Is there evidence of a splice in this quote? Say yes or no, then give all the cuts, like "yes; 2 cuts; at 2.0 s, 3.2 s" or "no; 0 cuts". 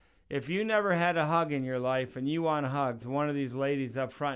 yes; 1 cut; at 3.0 s